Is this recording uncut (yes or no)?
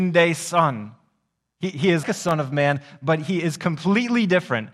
no